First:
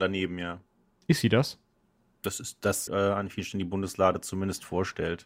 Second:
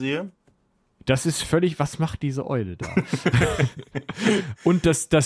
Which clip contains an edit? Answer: first; 1 cut; at 2.9 s

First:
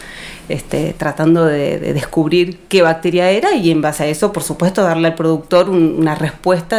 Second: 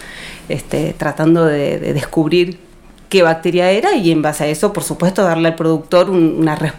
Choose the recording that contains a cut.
first; 1 cut; at 2.7 s

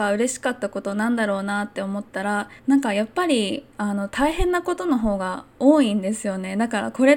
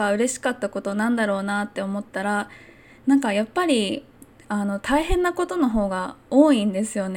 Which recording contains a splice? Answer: first; 2 cuts; at 2.6 s, 3.7 s

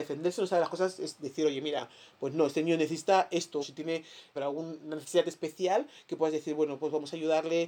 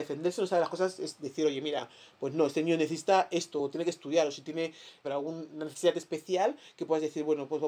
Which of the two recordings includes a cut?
first; 1 cut; at 3.6 s

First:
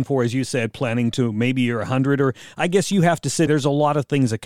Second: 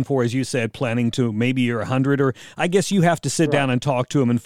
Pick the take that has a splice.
first; 1 cut; at 3.5 s

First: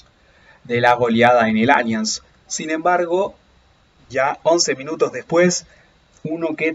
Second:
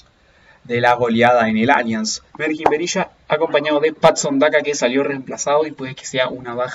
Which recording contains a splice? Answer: second; 1 cut; at 2.3 s

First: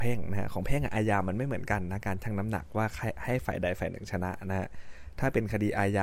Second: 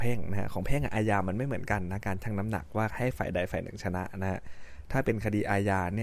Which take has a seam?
second; 1 cut; at 2.9 s

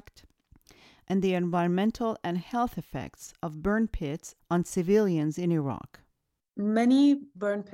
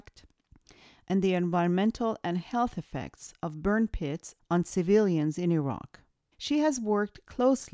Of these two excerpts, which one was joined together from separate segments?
second; 1 cut; at 6.3 s

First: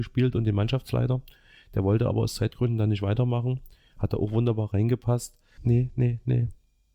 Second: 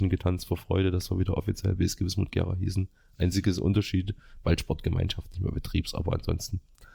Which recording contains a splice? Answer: first; 1 cut; at 5.6 s

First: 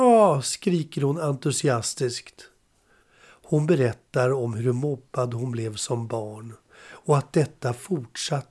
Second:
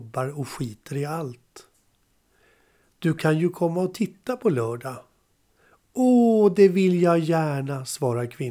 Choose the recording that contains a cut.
first; 1 cut; at 3.0 s

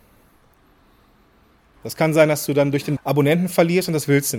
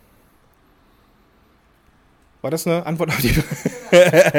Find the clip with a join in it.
first; 2 cuts; at 1.8 s, 3.0 s

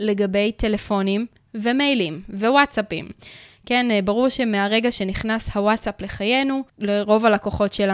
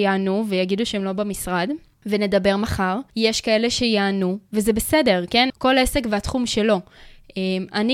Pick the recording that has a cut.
second; 2 cuts; at 3.1 s, 5.5 s

